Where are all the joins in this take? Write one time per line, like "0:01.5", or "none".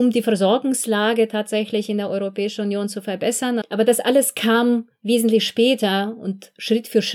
0:03.6